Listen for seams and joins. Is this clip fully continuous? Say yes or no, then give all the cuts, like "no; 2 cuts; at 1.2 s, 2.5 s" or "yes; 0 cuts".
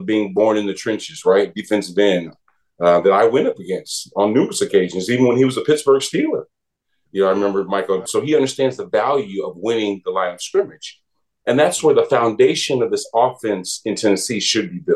no; 1 cut; at 8.1 s